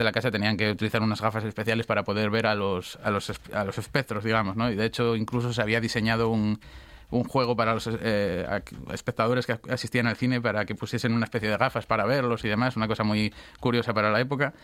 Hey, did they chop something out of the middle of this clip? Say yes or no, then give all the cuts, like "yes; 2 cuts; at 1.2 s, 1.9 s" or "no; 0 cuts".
no; 0 cuts